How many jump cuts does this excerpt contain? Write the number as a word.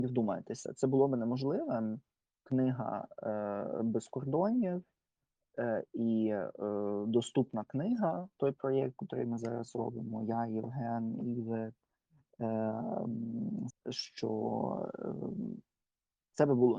one